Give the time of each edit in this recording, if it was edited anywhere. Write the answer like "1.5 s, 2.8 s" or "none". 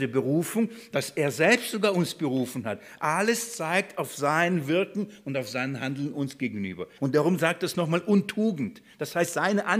7.0 s